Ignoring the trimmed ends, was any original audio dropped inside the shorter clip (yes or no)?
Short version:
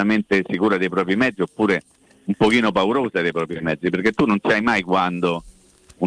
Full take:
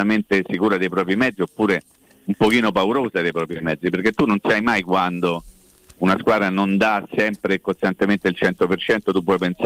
no